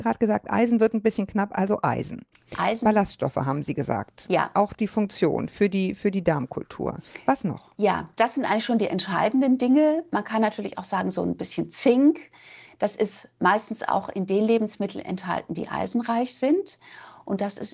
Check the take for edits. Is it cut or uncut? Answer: cut